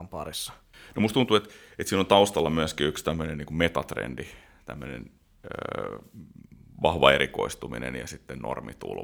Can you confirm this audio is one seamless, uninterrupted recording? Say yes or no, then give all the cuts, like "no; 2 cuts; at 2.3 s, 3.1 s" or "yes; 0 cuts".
yes; 0 cuts